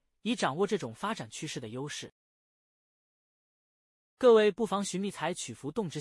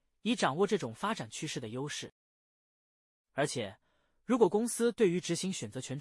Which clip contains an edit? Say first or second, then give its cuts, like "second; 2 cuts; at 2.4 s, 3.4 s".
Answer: second; 1 cut; at 3.2 s